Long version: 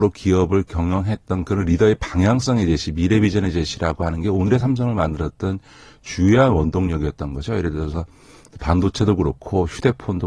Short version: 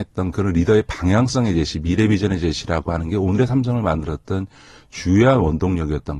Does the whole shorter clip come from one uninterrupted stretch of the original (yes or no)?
yes